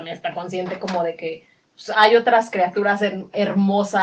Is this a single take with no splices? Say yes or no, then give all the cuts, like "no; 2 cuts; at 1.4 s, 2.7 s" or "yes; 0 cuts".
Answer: no; 1 cut; at 1.9 s